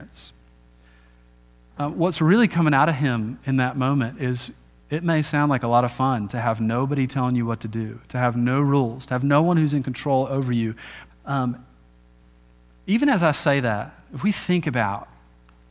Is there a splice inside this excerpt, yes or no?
yes